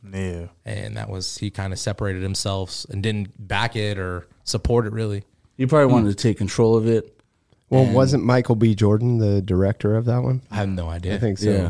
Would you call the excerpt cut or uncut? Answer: uncut